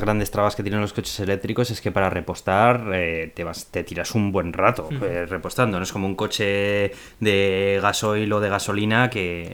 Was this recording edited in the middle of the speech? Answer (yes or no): no